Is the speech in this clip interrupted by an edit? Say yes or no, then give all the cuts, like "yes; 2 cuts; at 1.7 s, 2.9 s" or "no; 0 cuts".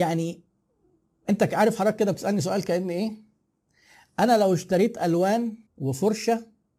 yes; 1 cut; at 5.7 s